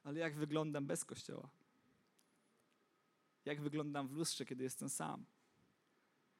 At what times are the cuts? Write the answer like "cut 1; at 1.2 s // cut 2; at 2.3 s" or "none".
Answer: none